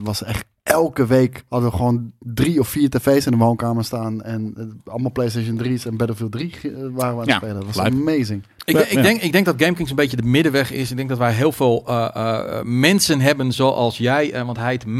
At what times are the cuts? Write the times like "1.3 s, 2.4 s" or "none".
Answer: none